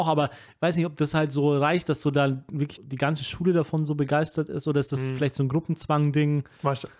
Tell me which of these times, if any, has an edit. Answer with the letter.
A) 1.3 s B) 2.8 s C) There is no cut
B